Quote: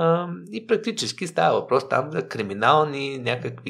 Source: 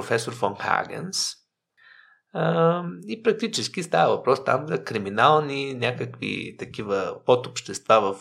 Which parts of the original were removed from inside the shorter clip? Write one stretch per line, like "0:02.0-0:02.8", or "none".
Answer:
none